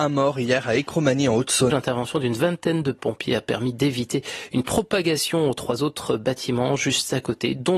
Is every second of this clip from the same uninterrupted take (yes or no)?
no